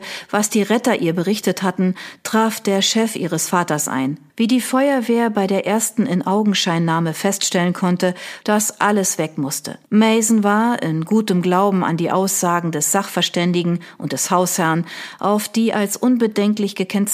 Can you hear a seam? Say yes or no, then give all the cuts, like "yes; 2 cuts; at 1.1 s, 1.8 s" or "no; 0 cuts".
yes; 3 cuts; at 4.3 s, 8.4 s, 9.8 s